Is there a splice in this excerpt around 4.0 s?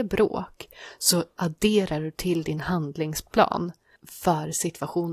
yes; 1 cut; at 4.0 s

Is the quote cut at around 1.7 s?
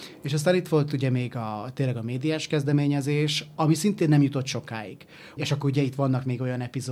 no; 2 cuts; at 3.6 s, 5.4 s

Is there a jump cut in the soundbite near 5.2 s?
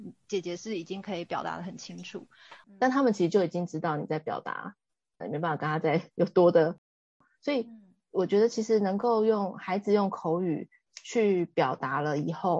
yes; 2 cuts; at 2.6 s, 5.2 s

